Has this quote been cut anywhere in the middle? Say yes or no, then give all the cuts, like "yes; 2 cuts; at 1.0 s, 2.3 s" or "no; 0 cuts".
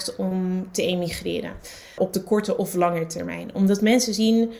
yes; 1 cut; at 2.0 s